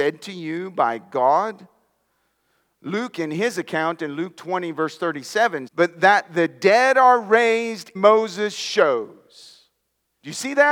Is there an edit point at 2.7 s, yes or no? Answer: no